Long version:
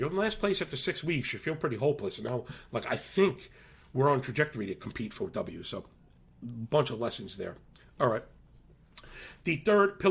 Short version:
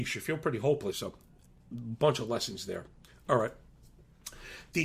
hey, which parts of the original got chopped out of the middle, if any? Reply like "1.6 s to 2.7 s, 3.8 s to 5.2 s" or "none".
2.1 s to 5.6 s